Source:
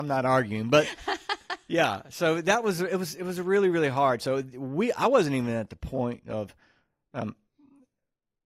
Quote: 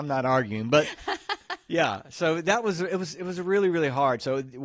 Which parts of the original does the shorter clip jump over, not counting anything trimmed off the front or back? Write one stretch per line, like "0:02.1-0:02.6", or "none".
none